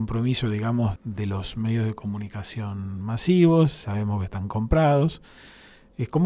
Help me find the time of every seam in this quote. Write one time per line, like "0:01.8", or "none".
0:01.0